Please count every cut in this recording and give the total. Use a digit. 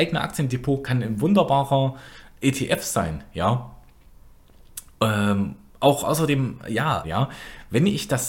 1